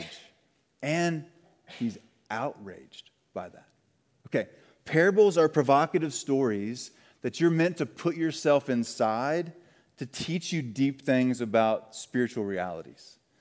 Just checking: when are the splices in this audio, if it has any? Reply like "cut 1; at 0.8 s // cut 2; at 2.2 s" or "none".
none